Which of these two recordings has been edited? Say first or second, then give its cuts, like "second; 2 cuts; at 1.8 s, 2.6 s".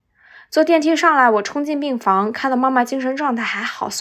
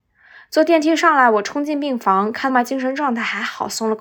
second; 1 cut; at 2.5 s